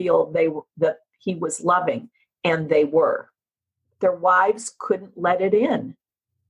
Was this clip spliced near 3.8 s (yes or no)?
yes